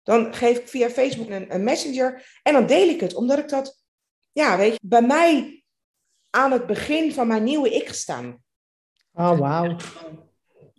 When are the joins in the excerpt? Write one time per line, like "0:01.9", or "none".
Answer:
0:01.3
0:04.8